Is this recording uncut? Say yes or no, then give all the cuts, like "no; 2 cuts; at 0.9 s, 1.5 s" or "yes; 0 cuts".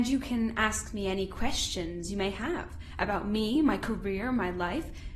yes; 0 cuts